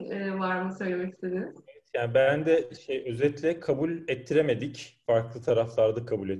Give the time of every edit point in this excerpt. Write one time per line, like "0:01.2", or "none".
none